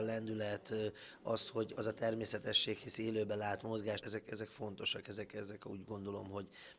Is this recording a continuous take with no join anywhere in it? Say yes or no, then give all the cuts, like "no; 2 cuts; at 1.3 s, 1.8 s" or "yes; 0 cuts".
no; 1 cut; at 4.0 s